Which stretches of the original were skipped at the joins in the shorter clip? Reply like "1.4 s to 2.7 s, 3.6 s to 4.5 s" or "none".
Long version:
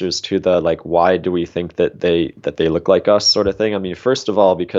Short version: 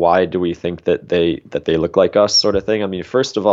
none

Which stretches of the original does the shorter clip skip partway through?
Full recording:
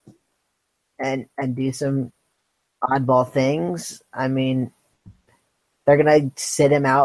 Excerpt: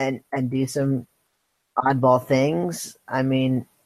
none

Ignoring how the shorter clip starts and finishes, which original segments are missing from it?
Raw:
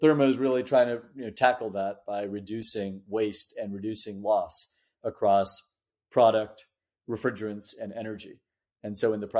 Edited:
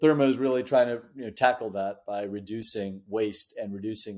none

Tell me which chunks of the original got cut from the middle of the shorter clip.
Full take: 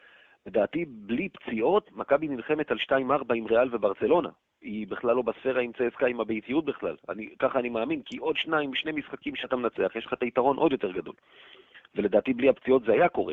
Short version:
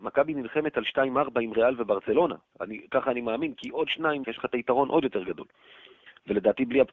4.5 s to 7.0 s, 8.7 s to 9.9 s

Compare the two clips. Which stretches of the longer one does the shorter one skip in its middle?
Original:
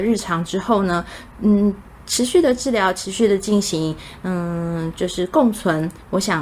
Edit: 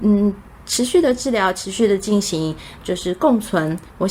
4.2 s to 4.9 s

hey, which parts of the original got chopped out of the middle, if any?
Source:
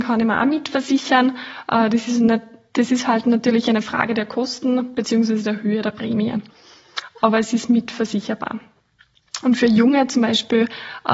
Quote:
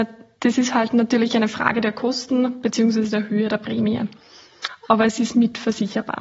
none

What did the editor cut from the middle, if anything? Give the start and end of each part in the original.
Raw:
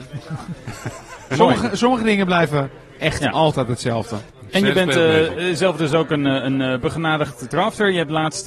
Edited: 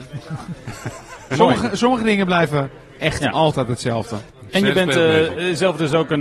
none

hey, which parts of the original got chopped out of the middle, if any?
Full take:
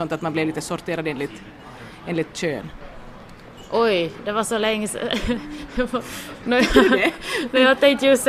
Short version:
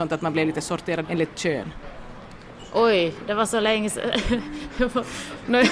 1.0 s to 2.0 s

